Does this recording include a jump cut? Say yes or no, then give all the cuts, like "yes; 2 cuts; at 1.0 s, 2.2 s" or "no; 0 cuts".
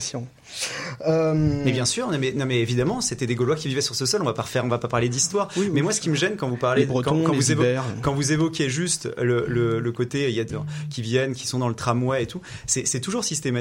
yes; 1 cut; at 10.5 s